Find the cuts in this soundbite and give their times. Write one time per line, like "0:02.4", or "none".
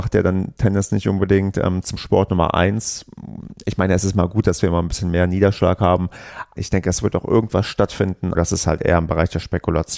0:06.6
0:08.3